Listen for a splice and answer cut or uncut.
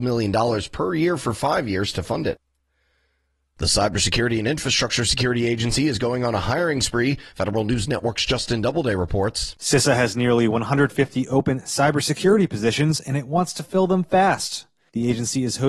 uncut